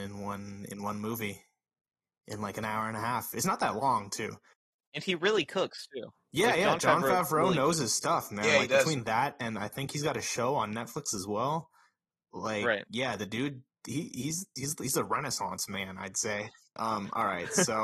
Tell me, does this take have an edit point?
yes; 1 cut; at 16.8 s

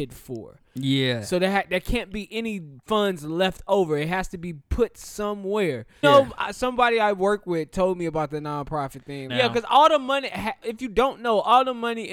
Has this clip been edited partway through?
yes; 3 cuts; at 6.0 s, 9.3 s, 10.6 s

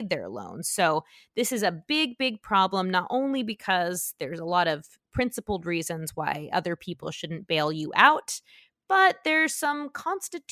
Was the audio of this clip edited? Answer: no; 0 cuts

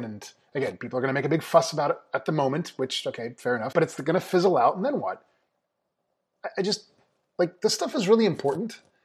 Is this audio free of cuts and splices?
no; 1 cut; at 3.7 s

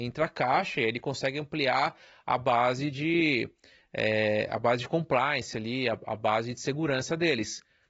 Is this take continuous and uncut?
yes; 0 cuts

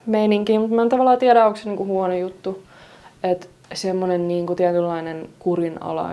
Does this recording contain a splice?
yes; 1 cut; at 3.6 s

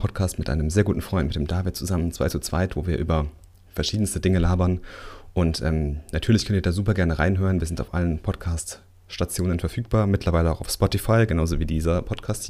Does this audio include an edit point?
no; 0 cuts

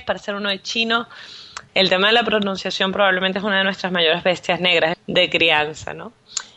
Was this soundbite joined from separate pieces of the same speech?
yes; 2 cuts; at 1.7 s, 4.9 s

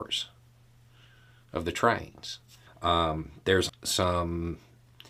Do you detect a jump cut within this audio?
yes; 2 cuts; at 2.7 s, 3.7 s

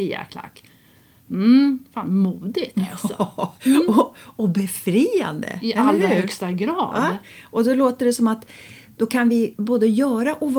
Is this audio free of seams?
yes; 0 cuts

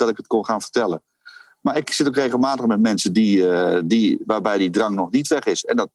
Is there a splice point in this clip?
no; 0 cuts

